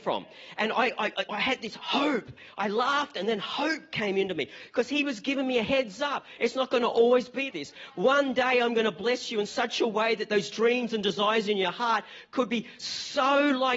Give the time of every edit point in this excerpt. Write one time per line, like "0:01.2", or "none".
0:01.3
0:07.5